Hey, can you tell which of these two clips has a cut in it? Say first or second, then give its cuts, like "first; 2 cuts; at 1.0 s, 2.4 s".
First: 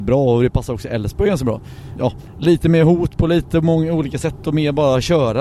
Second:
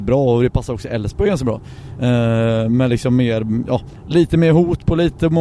first; 1 cut; at 2.0 s